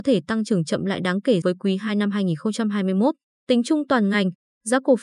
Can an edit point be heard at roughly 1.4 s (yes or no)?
yes